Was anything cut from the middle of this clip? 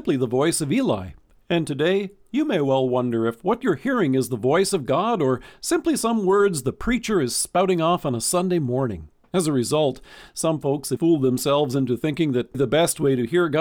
yes; 2 cuts; at 11.0 s, 12.5 s

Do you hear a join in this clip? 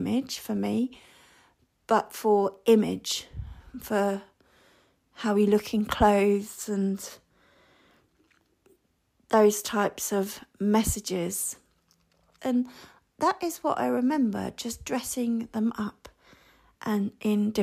yes; 1 cut; at 12.4 s

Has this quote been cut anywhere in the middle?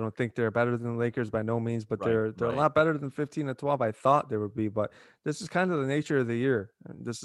no; 0 cuts

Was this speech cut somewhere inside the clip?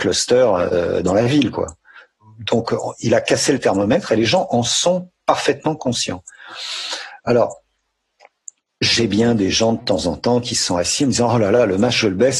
no; 0 cuts

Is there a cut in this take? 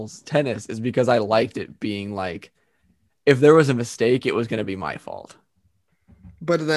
no; 0 cuts

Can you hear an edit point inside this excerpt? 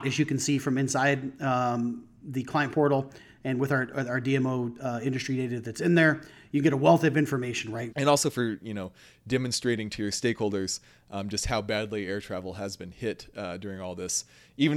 yes; 1 cut; at 7.9 s

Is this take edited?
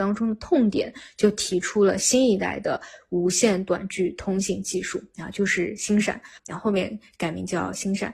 yes; 1 cut; at 6.4 s

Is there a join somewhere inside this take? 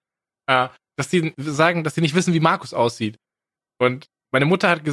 no; 0 cuts

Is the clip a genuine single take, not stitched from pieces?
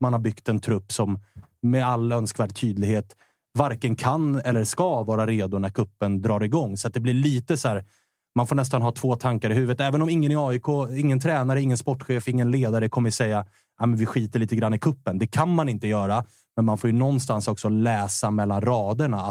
yes; 0 cuts

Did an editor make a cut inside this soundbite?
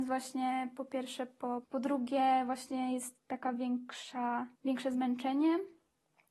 yes; 2 cuts; at 1.6 s, 4.5 s

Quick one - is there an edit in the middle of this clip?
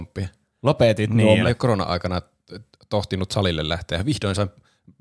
yes; 1 cut; at 1.4 s

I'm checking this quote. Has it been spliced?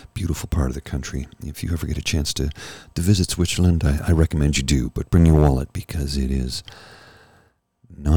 no; 0 cuts

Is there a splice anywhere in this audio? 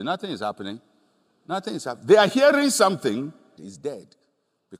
yes; 1 cut; at 3.6 s

